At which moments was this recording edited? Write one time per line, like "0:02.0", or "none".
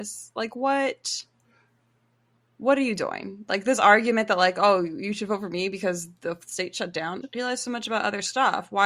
0:07.2

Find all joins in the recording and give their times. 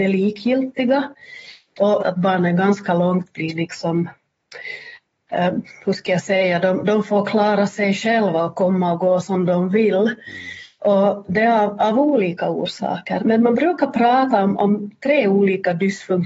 0:02.0
0:10.8
0:13.2

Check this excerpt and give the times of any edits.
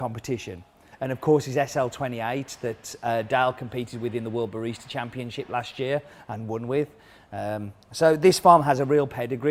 0:00.9

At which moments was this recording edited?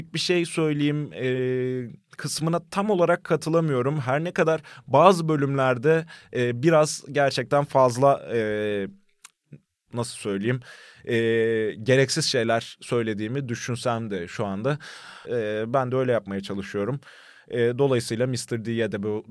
0:15.2

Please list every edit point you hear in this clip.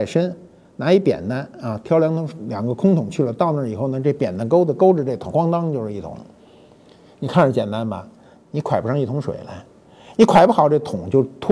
0:05.3

